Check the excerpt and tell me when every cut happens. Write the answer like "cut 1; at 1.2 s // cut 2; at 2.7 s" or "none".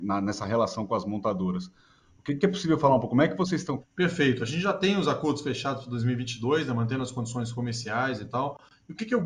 cut 1; at 3.8 s